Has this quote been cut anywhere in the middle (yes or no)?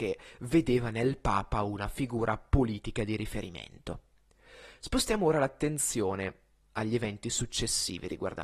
no